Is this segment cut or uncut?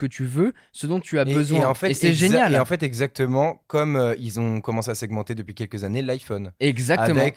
uncut